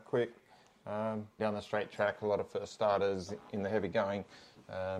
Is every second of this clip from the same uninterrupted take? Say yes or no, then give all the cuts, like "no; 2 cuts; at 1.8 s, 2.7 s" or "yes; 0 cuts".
no; 1 cut; at 1.4 s